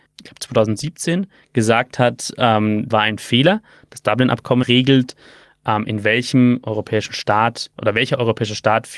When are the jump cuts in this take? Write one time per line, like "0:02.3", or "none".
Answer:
0:02.9
0:04.6

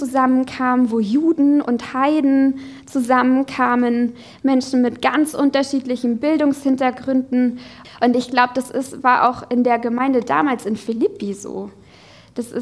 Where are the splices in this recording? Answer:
0:07.8

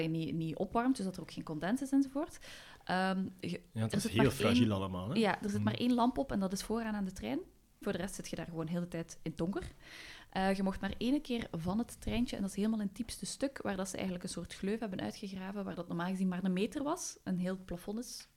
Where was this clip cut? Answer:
0:07.8

